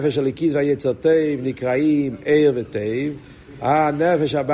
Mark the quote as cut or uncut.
uncut